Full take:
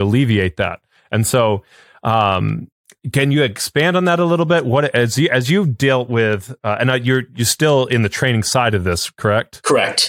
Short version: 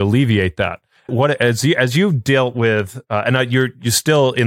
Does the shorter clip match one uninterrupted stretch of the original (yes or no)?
no